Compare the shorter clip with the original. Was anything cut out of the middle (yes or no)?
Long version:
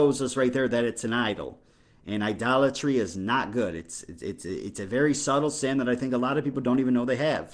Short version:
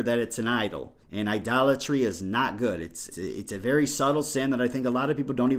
yes